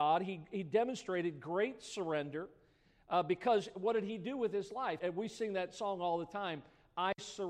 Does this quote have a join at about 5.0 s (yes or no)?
yes